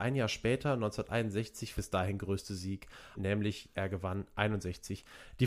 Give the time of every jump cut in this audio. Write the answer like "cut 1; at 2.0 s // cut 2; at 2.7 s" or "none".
cut 1; at 1.7 s // cut 2; at 3.1 s